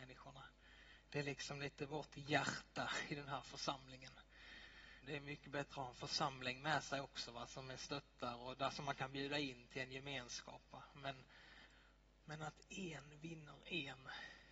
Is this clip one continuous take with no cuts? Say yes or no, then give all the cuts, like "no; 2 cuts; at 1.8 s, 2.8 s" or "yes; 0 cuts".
no; 1 cut; at 5.0 s